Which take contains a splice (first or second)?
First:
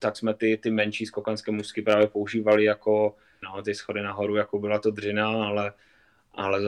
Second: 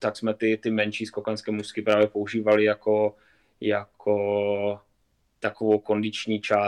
first